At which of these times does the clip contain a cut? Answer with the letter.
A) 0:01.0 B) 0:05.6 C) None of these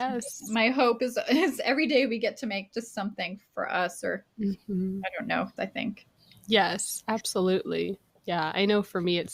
B